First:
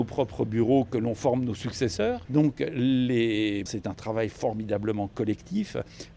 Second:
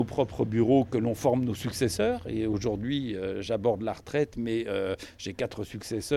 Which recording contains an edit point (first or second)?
first